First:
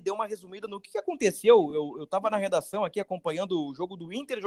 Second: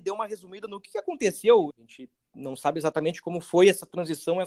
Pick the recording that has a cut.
second; 1 cut; at 1.7 s

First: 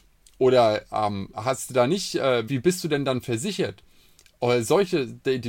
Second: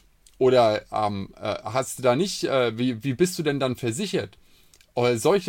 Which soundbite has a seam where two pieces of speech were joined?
first; 2 cuts; at 1.3 s, 2.5 s

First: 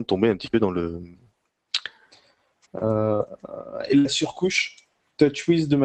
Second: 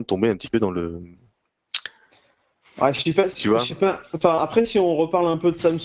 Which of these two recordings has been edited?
first; 1 cut; at 2.6 s

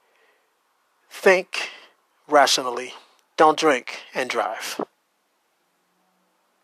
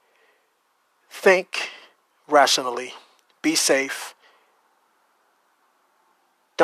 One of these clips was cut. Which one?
first; 1 cut; at 3.2 s

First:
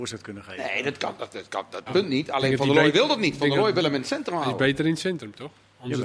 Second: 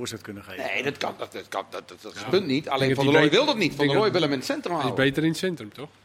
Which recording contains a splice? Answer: first; 1 cut; at 1.9 s

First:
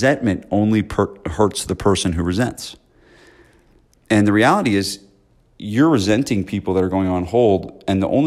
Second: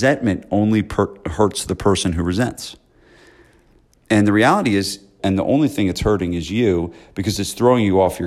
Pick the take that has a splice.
second; 1 cut; at 5.2 s

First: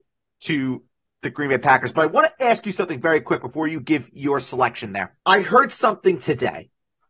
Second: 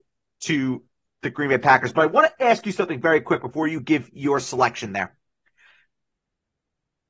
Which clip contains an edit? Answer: first; 1 cut; at 5.2 s

